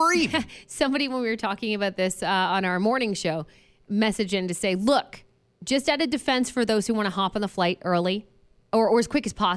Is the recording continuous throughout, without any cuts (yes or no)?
yes